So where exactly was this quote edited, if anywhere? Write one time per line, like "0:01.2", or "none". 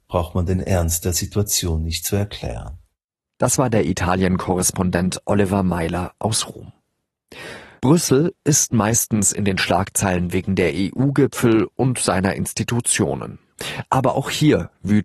none